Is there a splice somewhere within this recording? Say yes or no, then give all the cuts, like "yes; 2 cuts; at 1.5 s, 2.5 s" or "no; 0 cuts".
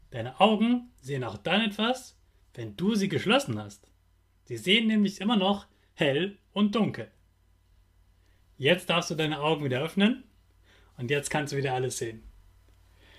no; 0 cuts